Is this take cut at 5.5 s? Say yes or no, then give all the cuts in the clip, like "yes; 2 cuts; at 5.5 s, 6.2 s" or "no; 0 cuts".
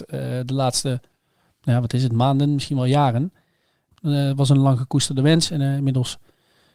no; 1 cut; at 3.9 s